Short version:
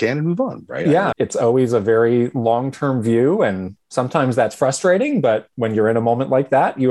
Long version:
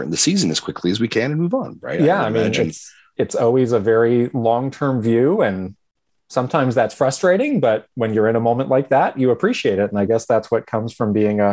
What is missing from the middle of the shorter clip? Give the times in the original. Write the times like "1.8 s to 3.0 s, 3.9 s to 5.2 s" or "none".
2.3 s to 3.1 s, 5.8 s to 6.2 s